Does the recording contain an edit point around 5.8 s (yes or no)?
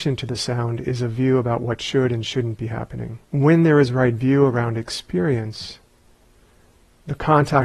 no